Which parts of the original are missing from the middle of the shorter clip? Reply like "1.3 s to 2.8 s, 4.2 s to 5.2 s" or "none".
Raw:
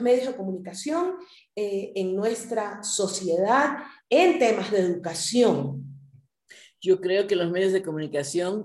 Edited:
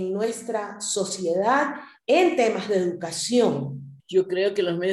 6.0 s to 6.7 s

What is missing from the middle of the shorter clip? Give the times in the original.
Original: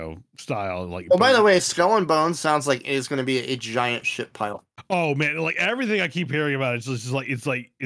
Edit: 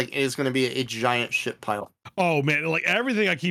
none

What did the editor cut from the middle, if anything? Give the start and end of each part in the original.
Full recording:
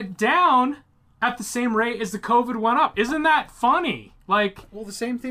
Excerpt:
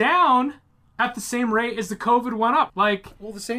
2.9 s to 4.2 s

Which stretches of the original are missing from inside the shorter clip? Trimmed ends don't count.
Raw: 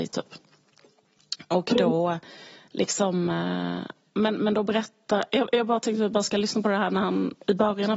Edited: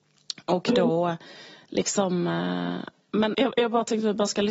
4.4 s to 5.3 s

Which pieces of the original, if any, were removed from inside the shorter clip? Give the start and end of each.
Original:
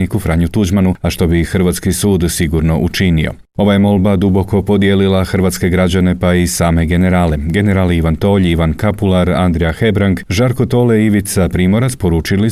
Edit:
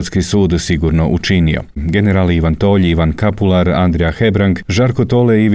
3.5 s to 7.4 s

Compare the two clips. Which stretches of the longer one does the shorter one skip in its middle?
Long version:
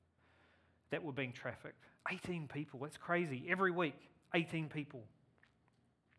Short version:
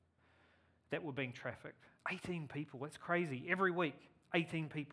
none

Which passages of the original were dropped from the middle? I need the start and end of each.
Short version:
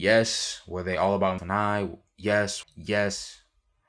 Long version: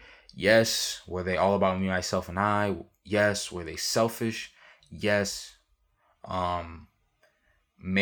1.8 s to 2.3 s, 3.5 s to 4.8 s

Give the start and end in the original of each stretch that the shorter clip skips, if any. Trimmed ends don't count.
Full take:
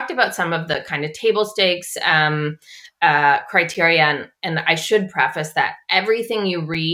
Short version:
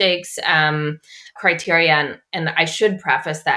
2.9 s to 3.5 s

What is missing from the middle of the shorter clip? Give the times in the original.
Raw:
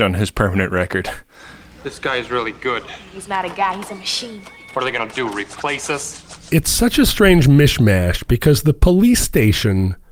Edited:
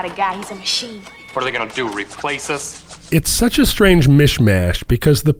none

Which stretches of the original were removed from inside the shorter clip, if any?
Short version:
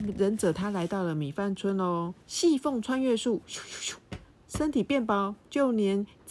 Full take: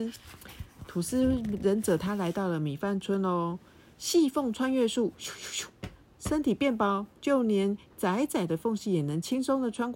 3.7 s to 3.9 s

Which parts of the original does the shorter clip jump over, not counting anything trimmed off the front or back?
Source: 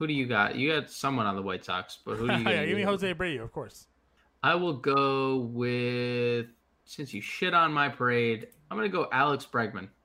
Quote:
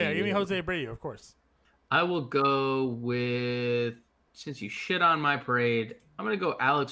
none

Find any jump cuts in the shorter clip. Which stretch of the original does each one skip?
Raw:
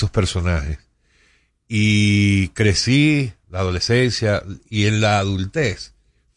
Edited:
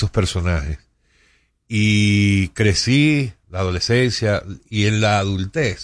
none

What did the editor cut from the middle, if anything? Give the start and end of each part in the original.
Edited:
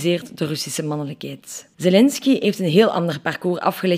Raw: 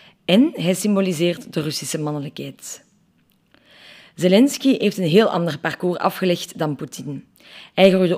2.9 s to 4.1 s

